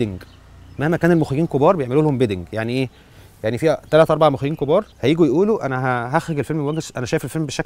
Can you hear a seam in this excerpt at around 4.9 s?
yes; 1 cut; at 4.9 s

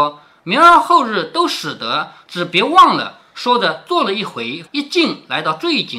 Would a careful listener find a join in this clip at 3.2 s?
no; 1 cut; at 4.7 s

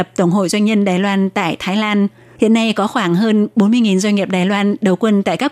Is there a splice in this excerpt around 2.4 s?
yes; 1 cut; at 2.4 s

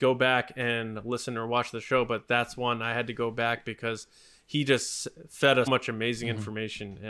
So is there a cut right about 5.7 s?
yes; 1 cut; at 5.7 s

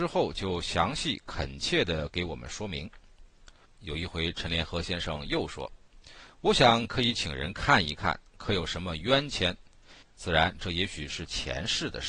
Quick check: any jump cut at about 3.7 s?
yes; 2 cuts; at 3.7 s, 10.0 s

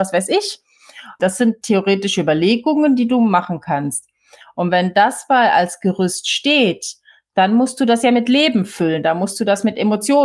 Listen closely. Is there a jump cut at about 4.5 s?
no; 1 cut; at 1.2 s

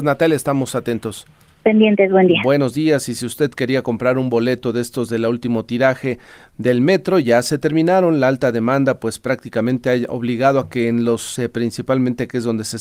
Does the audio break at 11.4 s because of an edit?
yes; 1 cut; at 11.4 s

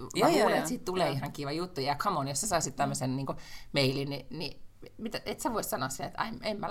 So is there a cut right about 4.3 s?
no; 0 cuts

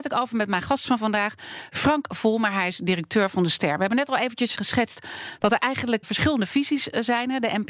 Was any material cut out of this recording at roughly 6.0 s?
yes; 2 cuts; at 4.5 s, 6.0 s

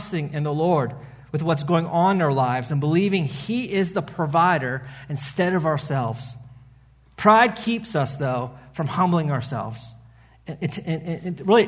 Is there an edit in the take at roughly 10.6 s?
yes; 1 cut; at 10.6 s

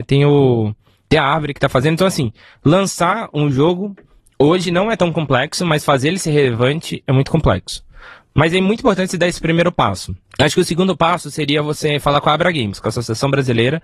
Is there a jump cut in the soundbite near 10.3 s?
yes; 1 cut; at 10.3 s

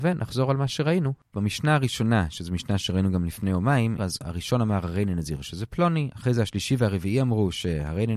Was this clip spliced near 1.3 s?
yes; 3 cuts; at 1.3 s, 4.0 s, 6.1 s

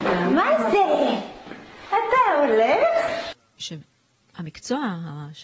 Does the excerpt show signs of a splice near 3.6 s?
yes; 1 cut; at 3.6 s

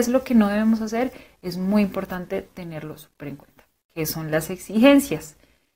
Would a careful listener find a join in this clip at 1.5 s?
no; 1 cut; at 3.8 s

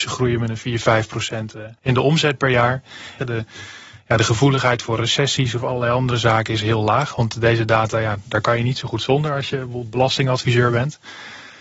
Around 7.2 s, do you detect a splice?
no; 2 cuts; at 1.8 s, 3.2 s

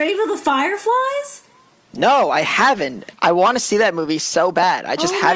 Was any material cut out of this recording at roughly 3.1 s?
yes; 1 cut; at 3.1 s

